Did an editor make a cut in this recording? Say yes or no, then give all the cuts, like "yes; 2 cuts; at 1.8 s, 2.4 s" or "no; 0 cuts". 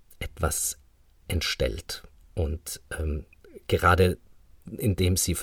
no; 0 cuts